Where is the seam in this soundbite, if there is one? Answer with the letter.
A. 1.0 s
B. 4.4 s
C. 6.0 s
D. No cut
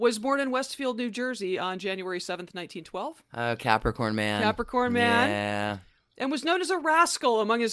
D